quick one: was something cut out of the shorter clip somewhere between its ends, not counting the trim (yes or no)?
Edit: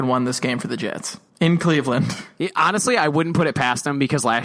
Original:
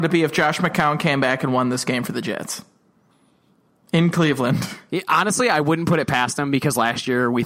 yes